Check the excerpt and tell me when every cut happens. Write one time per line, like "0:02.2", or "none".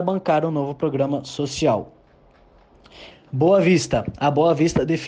0:03.1